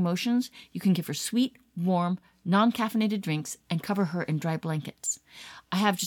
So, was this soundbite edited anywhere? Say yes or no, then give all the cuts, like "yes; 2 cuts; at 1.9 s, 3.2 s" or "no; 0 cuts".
no; 0 cuts